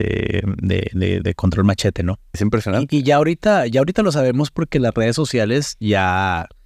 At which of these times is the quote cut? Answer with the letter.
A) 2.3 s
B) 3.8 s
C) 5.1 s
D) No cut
A